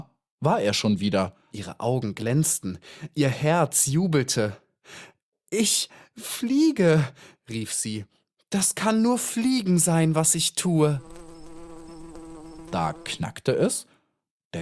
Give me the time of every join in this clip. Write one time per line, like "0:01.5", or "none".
0:01.5